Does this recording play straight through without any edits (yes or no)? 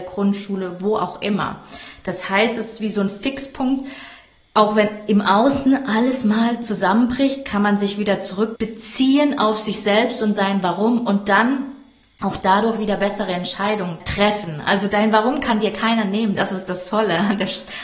yes